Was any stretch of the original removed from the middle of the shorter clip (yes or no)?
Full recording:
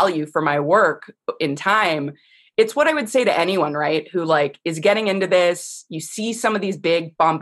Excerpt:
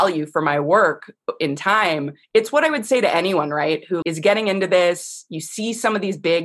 yes